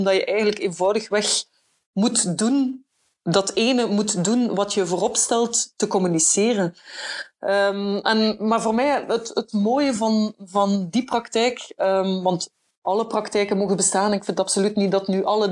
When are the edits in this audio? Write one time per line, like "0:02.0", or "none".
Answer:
none